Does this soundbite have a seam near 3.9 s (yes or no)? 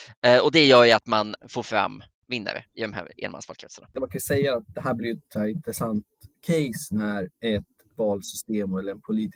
no